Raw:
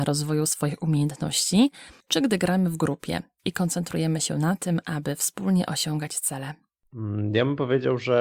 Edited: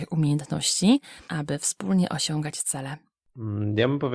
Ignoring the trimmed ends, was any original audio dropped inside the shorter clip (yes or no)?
yes